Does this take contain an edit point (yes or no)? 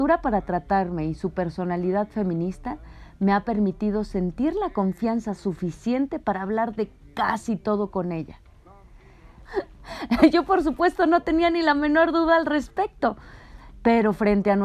yes